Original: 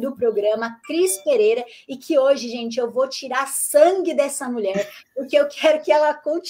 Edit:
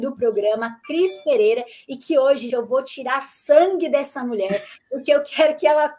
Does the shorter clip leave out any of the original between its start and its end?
yes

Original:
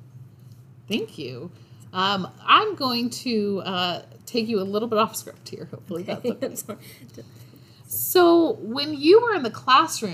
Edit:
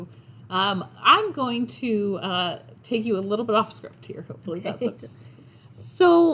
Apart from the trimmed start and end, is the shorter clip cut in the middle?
yes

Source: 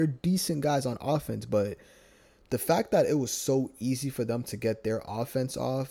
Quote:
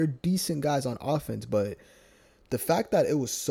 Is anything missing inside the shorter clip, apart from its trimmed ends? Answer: no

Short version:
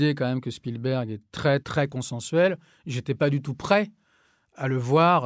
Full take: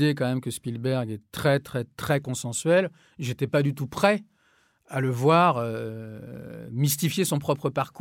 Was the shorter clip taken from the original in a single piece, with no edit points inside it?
no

